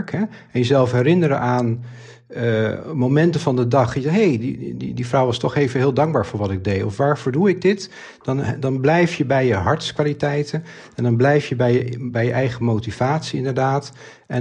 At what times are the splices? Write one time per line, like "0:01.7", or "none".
0:04.8